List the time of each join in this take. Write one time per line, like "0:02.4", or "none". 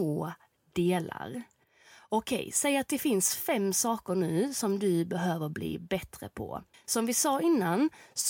0:06.7